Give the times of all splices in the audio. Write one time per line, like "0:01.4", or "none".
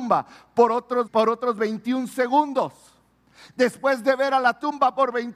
0:01.1